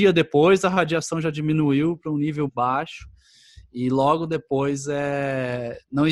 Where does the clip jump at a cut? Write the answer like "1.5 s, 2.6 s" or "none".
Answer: 2.5 s